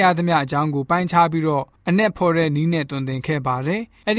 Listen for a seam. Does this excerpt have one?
no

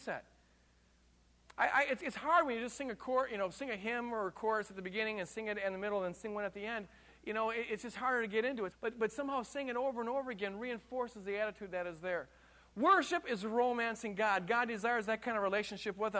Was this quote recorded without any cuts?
no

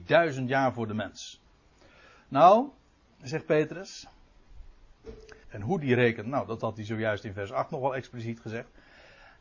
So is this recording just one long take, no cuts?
no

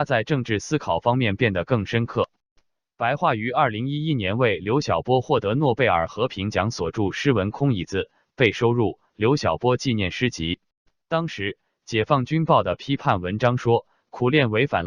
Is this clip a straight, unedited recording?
no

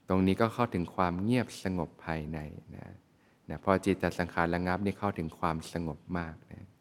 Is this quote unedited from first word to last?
yes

